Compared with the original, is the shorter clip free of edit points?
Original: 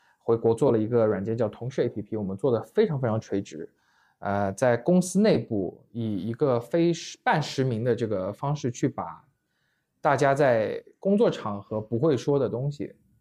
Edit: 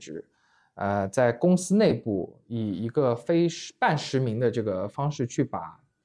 yes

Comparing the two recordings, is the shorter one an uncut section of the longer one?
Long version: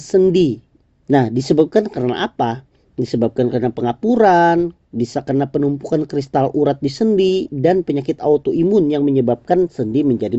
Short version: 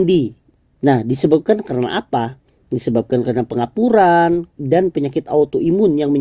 no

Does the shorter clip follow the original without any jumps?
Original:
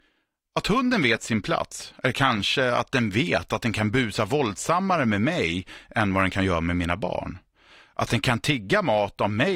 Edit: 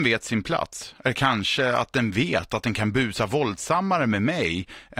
yes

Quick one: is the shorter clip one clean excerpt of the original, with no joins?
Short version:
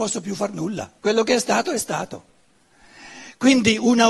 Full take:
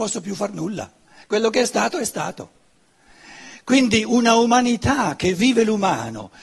no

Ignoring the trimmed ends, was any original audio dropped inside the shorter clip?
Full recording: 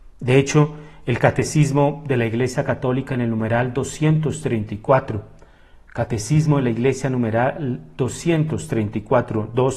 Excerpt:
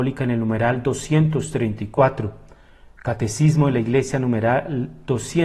no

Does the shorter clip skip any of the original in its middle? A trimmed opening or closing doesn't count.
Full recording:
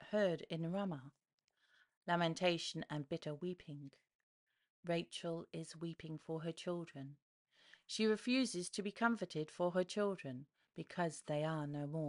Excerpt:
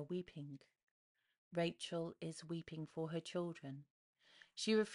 no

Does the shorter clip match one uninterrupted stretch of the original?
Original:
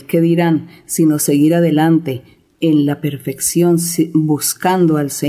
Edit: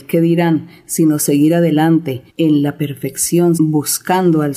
no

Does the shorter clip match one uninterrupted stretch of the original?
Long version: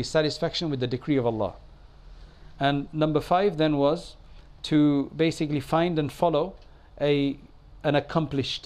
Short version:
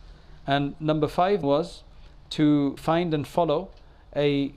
no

